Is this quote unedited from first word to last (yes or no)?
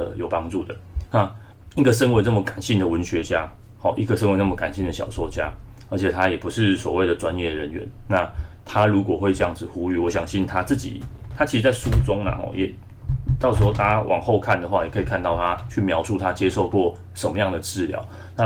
no